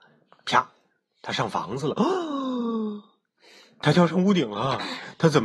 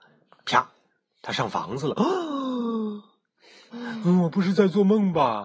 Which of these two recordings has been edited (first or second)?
second